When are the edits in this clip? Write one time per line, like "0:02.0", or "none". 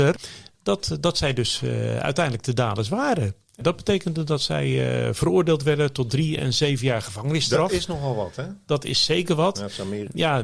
none